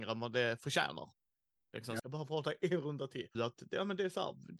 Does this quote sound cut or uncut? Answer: cut